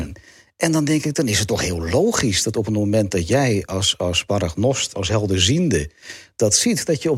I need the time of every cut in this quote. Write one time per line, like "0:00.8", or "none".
0:04.9